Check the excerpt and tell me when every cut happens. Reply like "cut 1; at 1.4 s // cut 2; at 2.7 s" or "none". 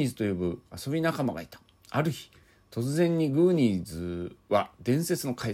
none